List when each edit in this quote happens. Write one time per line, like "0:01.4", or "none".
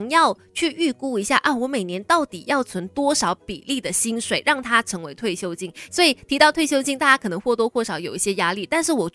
0:05.9